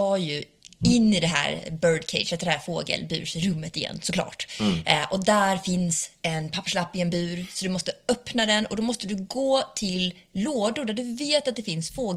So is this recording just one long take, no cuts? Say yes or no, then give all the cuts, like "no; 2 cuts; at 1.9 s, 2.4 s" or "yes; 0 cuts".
yes; 0 cuts